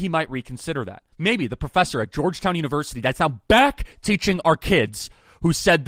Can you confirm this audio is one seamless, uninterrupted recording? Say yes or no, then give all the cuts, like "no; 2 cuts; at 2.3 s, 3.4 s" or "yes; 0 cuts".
no; 1 cut; at 1.1 s